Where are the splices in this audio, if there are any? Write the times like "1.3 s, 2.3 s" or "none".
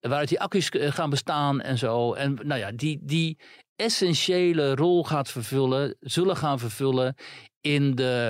none